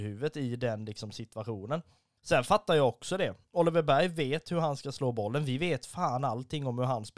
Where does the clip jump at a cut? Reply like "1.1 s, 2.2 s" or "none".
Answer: none